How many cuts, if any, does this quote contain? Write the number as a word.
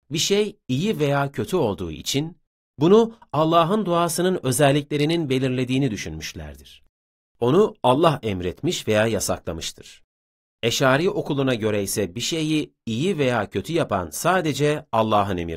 zero